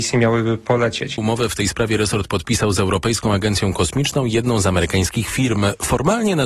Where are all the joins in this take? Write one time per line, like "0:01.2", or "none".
0:01.2